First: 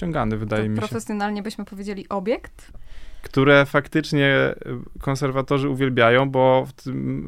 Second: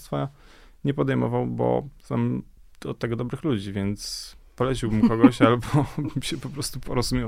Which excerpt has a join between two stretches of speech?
first; 1 cut; at 2.7 s

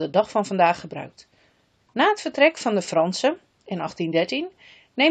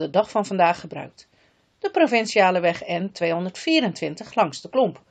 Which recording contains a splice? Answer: first; 1 cut; at 1.7 s

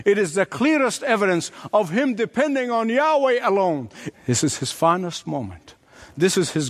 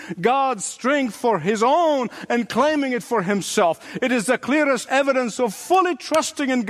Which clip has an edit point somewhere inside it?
first; 1 cut; at 4.1 s

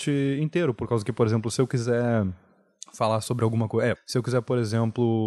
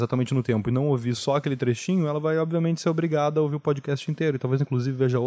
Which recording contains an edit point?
first; 1 cut; at 3.9 s

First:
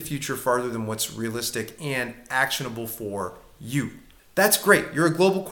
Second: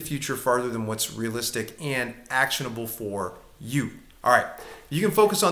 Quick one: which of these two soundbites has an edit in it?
first; 1 cut; at 4.2 s

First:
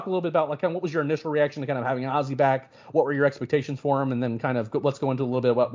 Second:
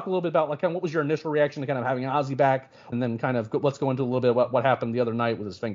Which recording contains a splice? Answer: second; 1 cut; at 2.9 s

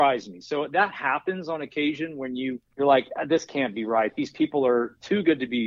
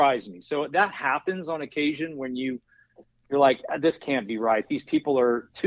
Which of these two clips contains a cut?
first; 1 cut; at 2.7 s

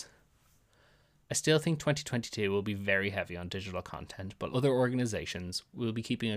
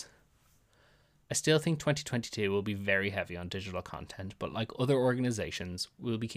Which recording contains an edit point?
first; 1 cut; at 4.5 s

